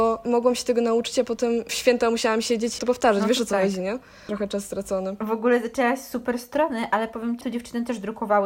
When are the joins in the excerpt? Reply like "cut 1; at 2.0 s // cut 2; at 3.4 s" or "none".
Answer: cut 1; at 4.3 s // cut 2; at 7.4 s